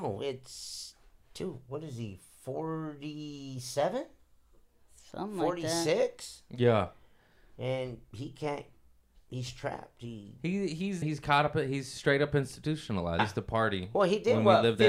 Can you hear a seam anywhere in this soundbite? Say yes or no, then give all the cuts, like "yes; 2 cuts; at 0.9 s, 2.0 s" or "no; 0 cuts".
yes; 2 cuts; at 11.0 s, 13.2 s